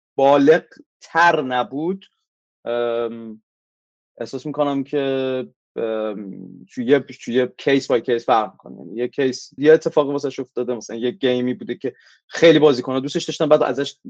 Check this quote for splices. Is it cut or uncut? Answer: cut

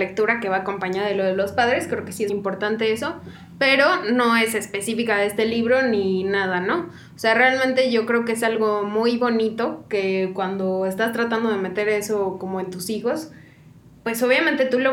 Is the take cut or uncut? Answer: cut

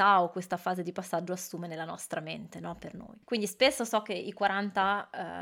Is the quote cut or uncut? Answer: cut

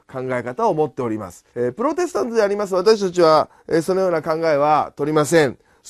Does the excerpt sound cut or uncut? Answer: cut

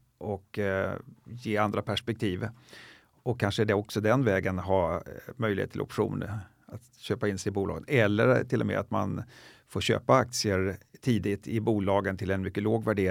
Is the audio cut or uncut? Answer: uncut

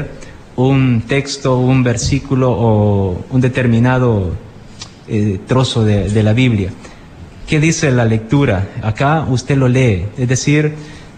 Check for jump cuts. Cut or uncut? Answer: uncut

